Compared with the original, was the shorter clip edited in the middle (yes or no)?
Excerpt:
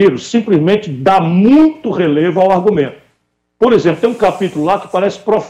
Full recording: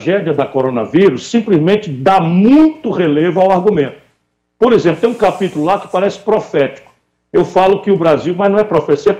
no